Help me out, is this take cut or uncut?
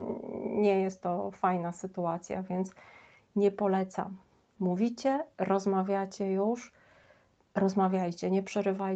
uncut